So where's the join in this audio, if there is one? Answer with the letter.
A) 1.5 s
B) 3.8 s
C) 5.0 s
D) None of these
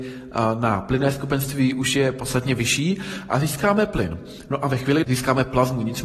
C